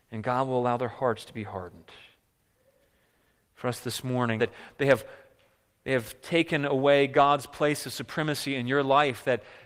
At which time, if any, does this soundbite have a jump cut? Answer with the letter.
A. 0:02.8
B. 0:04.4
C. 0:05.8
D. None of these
B